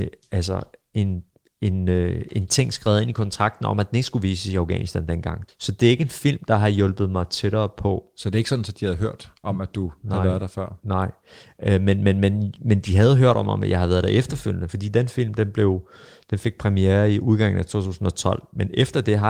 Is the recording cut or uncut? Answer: cut